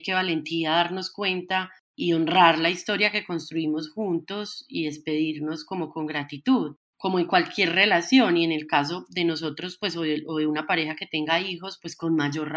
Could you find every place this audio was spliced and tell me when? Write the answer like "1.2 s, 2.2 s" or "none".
none

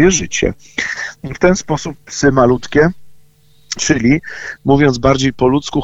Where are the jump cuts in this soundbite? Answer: 1.2 s, 3.8 s

